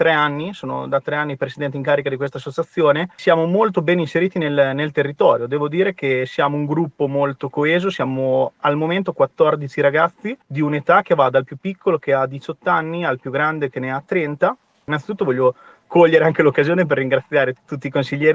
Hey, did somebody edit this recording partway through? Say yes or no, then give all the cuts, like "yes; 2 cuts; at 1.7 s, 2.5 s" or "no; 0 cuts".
no; 0 cuts